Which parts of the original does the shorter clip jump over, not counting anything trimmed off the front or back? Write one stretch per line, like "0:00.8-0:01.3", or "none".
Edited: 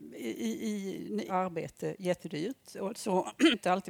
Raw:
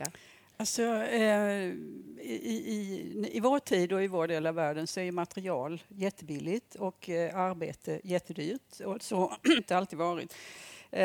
0:03.3-0:07.3